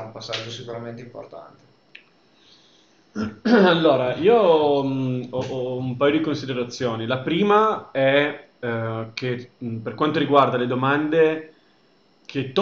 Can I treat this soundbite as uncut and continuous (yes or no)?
yes